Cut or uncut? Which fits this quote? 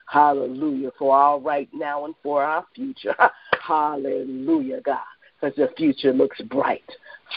uncut